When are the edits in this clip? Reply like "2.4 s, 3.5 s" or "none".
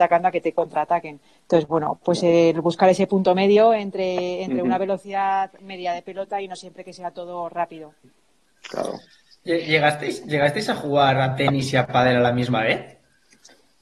none